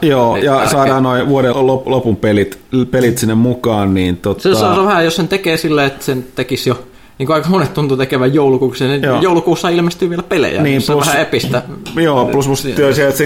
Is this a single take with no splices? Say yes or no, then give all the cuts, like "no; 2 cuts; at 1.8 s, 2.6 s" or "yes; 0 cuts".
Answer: no; 1 cut; at 1.5 s